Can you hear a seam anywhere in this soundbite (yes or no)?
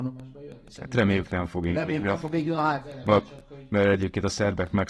no